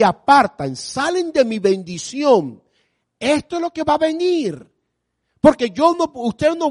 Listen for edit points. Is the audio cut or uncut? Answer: uncut